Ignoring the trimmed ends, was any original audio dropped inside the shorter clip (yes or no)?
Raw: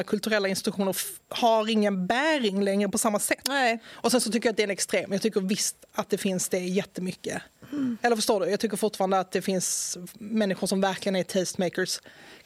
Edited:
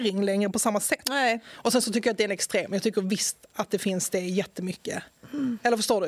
no